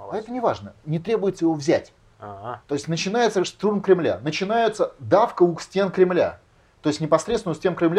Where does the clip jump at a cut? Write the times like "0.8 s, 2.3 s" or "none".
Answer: 2.6 s